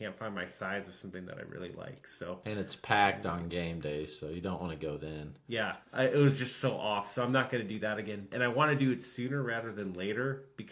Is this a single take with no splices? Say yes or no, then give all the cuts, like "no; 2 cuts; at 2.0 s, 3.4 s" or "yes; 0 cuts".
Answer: no; 2 cuts; at 5.8 s, 8.3 s